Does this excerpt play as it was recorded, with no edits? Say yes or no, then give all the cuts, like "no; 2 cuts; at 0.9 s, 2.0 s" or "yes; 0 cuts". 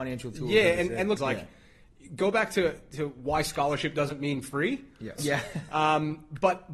no; 2 cuts; at 1.2 s, 5.2 s